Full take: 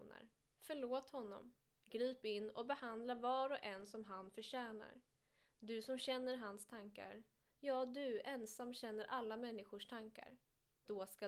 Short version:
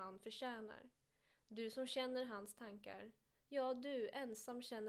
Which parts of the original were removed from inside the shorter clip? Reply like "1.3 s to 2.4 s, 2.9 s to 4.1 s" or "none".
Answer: none